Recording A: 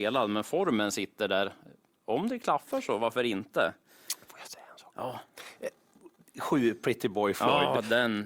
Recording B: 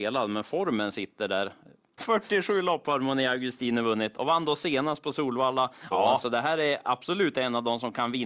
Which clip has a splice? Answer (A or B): B